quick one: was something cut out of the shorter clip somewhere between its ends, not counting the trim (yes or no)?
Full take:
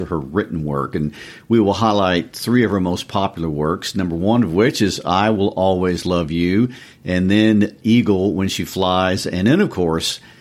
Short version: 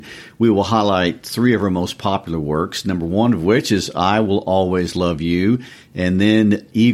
no